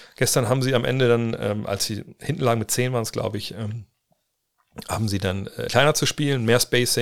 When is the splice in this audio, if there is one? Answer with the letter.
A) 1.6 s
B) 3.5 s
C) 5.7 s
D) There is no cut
C